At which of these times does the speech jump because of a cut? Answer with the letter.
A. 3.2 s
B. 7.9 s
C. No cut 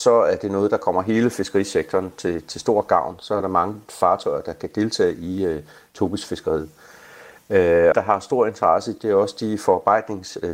B